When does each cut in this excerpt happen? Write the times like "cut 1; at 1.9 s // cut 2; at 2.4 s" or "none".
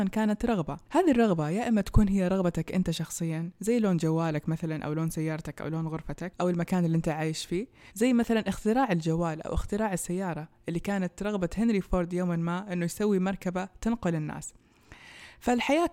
cut 1; at 7.9 s